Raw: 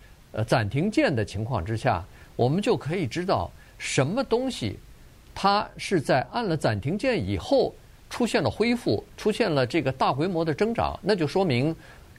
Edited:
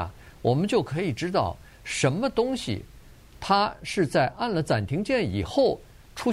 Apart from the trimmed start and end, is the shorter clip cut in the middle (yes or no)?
no